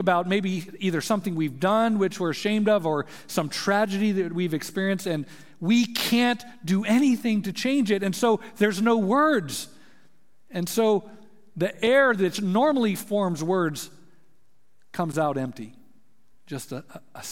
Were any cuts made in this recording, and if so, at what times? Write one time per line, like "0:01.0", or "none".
none